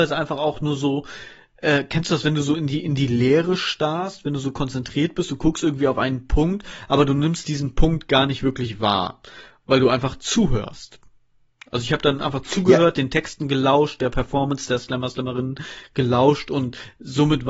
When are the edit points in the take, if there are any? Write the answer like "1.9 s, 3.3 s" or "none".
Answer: none